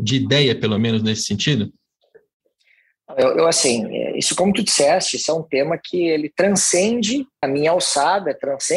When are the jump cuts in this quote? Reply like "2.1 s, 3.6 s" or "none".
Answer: 7.4 s